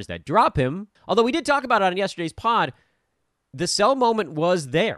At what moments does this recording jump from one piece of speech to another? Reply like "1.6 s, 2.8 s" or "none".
1.0 s

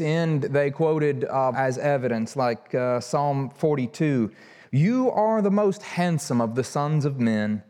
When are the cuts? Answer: 1.5 s

